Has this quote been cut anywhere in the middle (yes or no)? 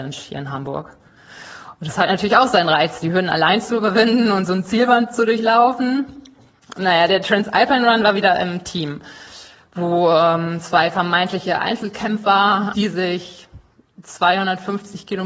yes